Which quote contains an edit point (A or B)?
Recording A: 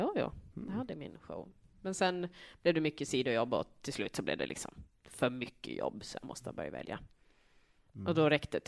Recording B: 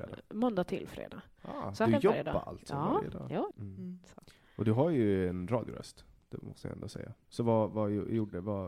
B